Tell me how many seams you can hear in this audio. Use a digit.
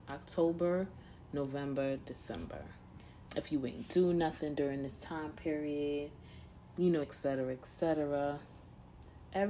2